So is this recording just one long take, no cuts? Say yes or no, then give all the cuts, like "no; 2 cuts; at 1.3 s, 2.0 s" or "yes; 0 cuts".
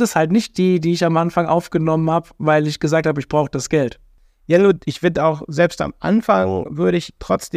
yes; 0 cuts